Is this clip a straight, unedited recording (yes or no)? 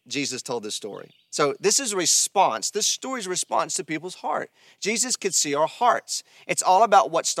yes